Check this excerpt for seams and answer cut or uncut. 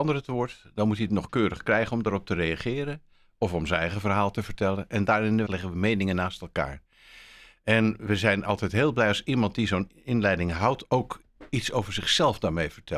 cut